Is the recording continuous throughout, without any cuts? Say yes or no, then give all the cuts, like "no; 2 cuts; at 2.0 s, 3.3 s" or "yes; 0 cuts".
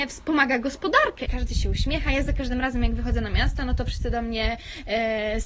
no; 1 cut; at 1.3 s